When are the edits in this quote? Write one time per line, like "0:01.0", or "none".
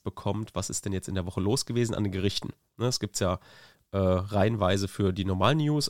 none